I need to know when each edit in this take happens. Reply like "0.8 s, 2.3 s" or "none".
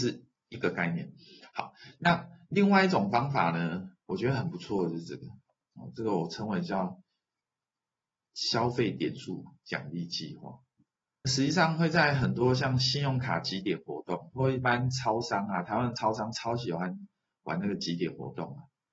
11.2 s